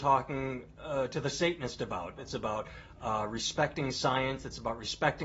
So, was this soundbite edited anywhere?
yes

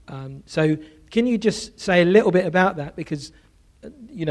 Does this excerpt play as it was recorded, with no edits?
yes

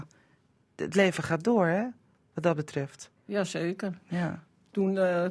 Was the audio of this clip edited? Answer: no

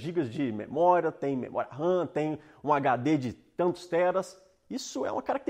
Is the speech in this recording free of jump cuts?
yes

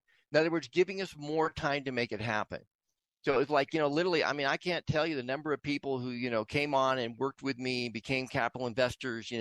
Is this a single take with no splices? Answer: yes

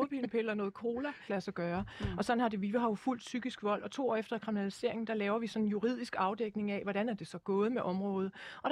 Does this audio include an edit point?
yes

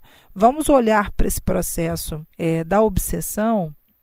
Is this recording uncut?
no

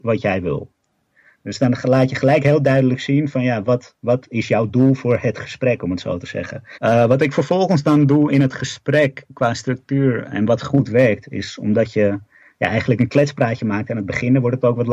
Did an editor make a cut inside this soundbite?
yes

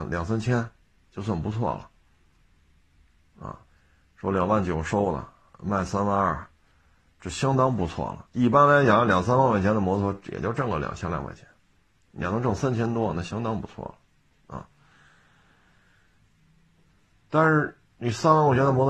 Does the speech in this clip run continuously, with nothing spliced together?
yes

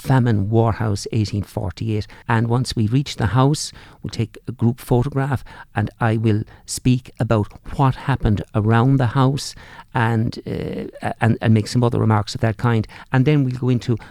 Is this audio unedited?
no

